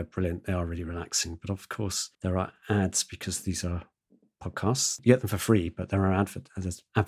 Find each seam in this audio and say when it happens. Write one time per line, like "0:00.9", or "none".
0:02.1

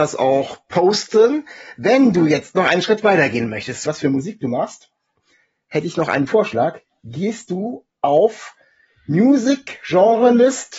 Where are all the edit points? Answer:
0:03.9

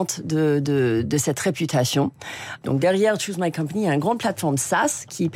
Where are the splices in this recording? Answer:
0:02.6

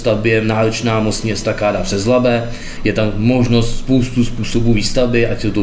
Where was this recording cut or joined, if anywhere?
0:02.8

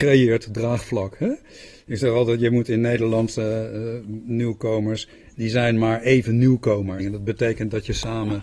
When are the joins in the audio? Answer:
0:07.0

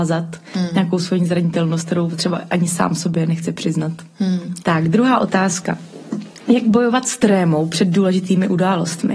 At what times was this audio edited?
0:04.6

